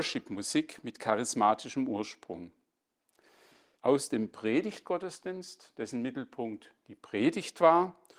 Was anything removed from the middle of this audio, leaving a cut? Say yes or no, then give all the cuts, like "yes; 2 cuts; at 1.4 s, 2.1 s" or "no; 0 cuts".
yes; 1 cut; at 3.8 s